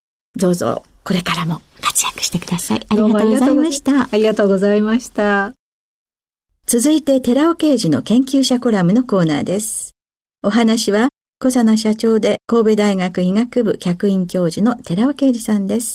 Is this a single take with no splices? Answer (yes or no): yes